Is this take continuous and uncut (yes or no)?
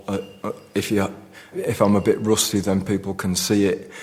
no